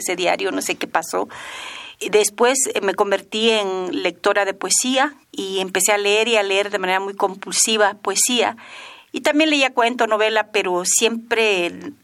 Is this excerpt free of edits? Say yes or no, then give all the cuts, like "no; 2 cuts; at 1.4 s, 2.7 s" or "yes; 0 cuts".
no; 1 cut; at 5.2 s